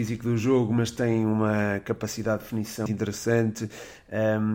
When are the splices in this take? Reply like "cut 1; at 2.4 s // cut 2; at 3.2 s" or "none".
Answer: cut 1; at 2.9 s